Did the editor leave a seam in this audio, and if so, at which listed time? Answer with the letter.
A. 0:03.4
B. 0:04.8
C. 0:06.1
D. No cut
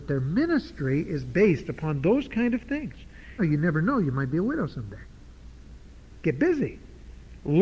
A